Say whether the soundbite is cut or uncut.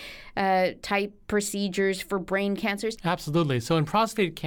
cut